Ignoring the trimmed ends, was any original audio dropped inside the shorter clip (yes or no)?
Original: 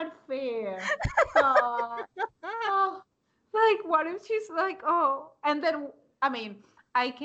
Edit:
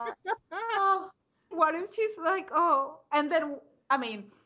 yes